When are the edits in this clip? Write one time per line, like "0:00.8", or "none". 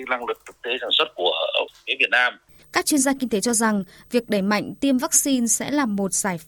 0:02.6